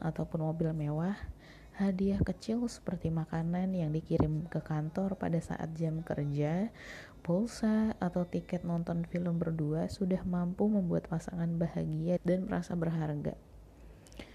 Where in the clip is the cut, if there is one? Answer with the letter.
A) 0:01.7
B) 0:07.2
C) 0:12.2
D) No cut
C